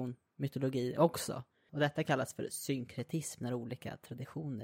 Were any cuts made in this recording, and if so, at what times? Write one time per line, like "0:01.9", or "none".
0:01.7